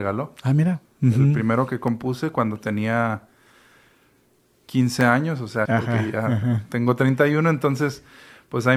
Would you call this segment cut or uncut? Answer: cut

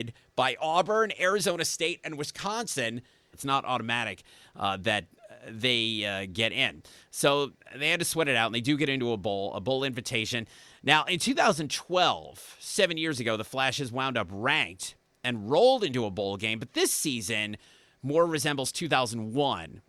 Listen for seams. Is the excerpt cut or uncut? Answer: cut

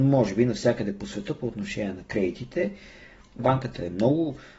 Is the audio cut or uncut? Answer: cut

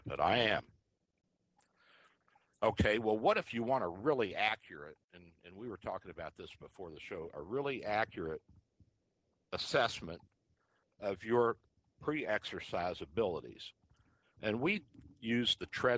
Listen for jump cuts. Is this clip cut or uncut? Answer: uncut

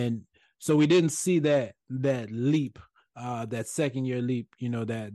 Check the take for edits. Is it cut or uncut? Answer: uncut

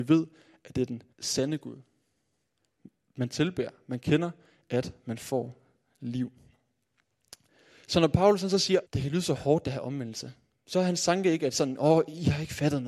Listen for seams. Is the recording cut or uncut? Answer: cut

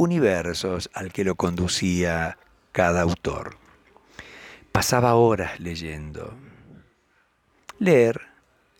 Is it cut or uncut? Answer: cut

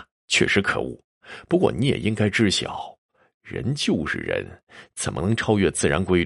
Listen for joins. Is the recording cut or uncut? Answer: uncut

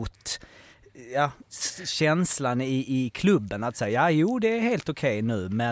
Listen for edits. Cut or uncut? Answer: uncut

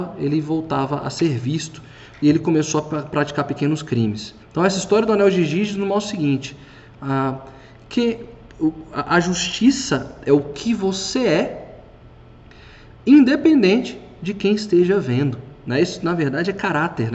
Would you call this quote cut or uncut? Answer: cut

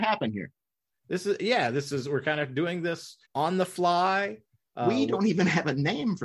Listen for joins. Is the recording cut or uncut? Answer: cut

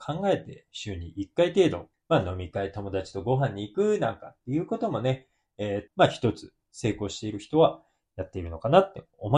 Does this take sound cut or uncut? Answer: cut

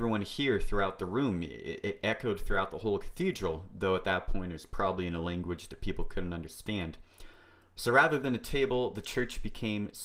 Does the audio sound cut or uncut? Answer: uncut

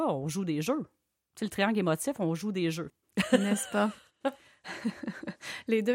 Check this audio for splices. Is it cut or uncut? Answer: cut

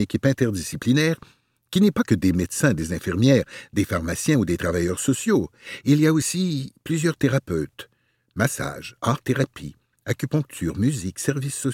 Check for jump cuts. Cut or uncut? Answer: uncut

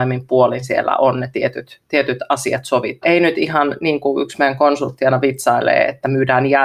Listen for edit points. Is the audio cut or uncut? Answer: cut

